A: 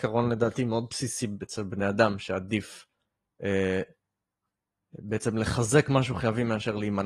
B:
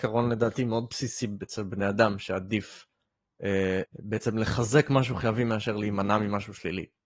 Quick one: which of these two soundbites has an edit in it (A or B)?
B